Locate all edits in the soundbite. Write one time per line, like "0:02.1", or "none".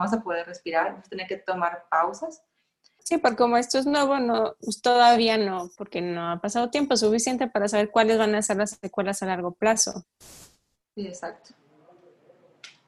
0:03.0